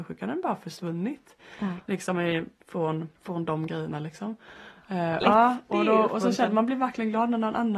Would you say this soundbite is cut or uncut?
cut